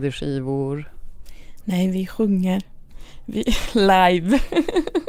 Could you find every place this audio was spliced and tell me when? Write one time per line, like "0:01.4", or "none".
none

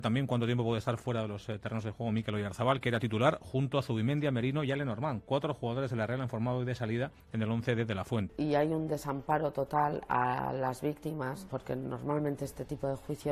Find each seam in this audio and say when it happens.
0:07.2
0:08.3

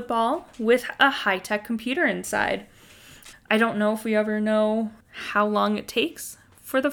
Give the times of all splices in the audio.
0:03.3
0:05.0

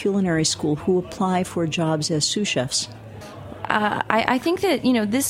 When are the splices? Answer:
0:03.2

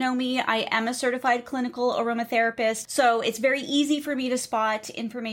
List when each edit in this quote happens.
0:02.8

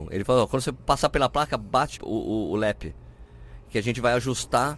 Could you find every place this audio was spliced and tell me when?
0:02.0

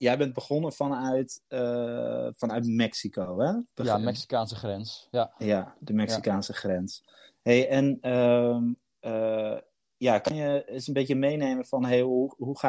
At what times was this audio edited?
none

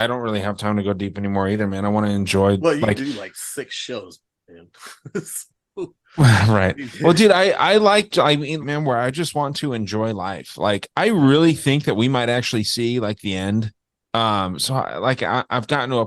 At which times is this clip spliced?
0:08.6
0:14.0

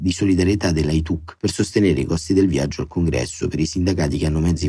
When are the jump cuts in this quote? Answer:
none

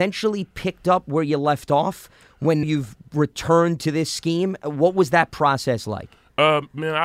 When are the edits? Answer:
0:02.6

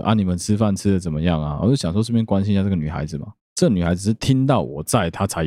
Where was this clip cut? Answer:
0:03.4

